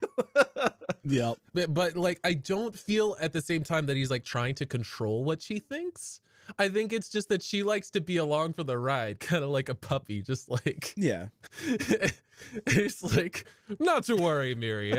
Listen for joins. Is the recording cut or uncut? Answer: cut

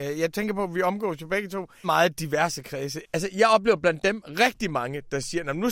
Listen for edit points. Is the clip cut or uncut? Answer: cut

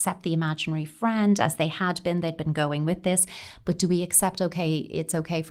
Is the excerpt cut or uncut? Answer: uncut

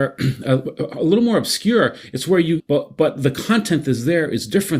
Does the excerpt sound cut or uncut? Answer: cut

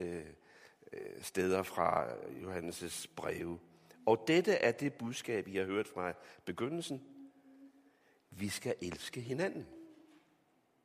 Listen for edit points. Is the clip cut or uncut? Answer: uncut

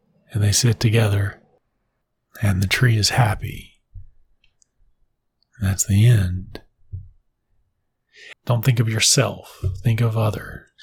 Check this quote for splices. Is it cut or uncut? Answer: cut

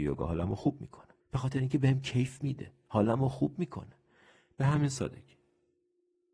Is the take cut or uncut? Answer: cut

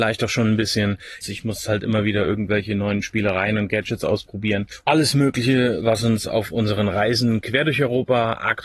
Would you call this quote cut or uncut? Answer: cut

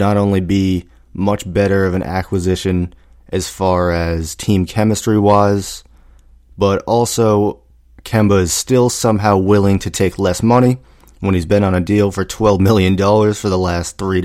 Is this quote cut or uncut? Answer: uncut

